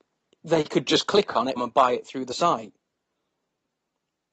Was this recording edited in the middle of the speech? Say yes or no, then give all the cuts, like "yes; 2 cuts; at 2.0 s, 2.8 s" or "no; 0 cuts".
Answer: yes; 1 cut; at 1.6 s